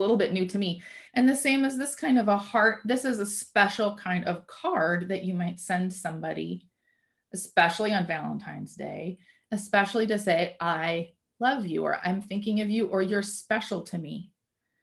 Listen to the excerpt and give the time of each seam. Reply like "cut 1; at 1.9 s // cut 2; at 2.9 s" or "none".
cut 1; at 1.1 s